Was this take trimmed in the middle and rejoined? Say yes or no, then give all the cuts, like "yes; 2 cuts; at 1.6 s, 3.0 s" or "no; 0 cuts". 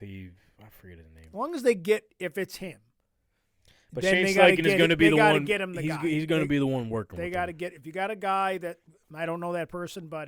no; 0 cuts